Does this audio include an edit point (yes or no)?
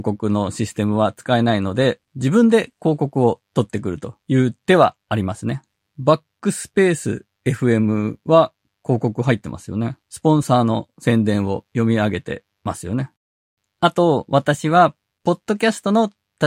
no